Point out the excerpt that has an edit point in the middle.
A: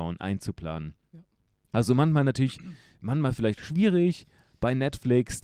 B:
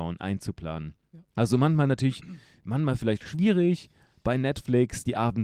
B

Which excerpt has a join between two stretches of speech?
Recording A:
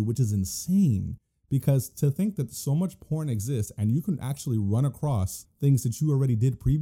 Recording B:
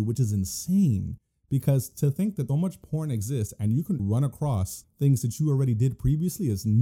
B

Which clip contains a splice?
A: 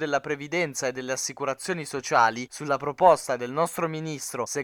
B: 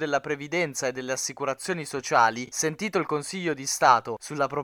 A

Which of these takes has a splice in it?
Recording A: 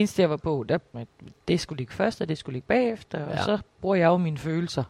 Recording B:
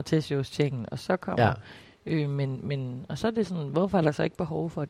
A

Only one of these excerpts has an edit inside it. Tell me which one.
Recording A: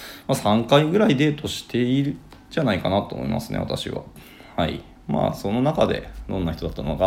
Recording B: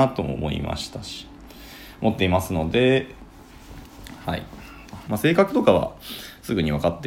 B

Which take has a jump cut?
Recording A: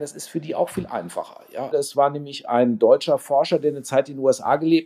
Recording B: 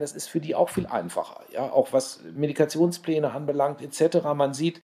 A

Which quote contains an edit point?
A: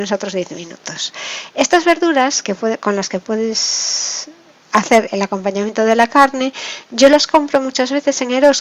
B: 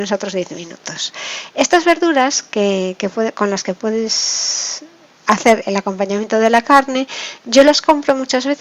A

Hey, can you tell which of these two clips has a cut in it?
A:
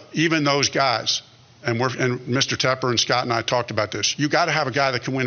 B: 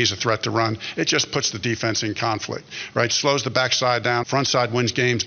B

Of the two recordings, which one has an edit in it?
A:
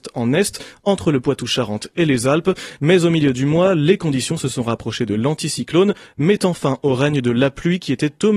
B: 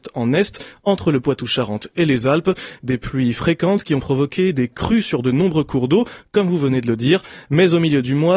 A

